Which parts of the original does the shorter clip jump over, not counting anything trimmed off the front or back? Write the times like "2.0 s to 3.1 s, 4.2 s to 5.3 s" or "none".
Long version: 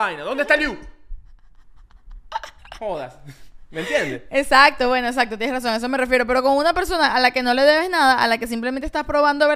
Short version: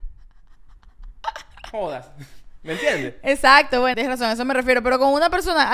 5.0 s to 5.4 s